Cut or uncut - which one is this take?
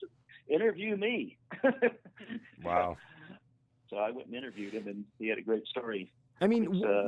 uncut